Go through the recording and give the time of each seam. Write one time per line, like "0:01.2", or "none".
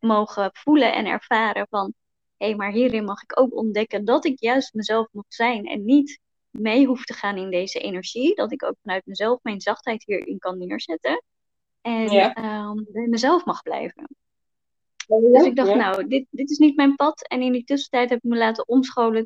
0:15.0